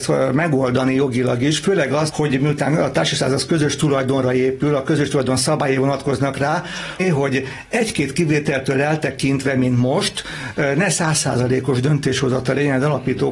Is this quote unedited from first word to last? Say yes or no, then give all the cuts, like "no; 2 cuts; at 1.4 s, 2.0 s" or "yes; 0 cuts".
no; 2 cuts; at 2.1 s, 7.0 s